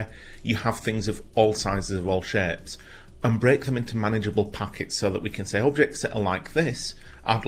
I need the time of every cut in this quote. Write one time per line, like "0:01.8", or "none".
none

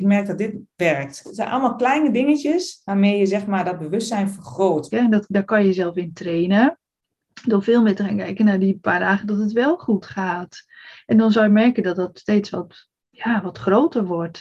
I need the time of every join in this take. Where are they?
0:01.2
0:04.9

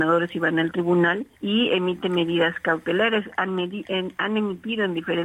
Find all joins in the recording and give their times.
0:01.3

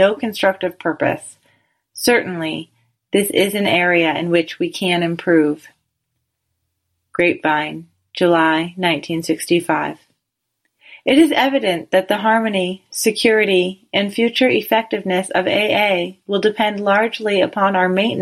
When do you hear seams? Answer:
none

